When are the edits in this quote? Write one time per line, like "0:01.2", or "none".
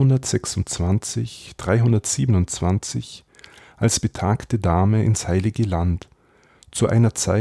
none